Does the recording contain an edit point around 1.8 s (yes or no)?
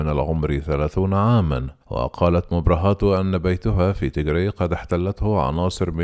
yes